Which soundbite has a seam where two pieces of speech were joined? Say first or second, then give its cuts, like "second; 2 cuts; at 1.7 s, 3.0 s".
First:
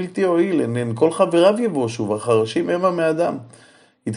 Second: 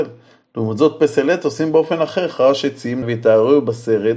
second; 1 cut; at 3.0 s